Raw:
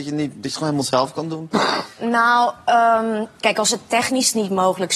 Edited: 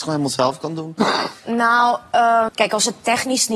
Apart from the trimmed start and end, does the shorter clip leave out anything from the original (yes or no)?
yes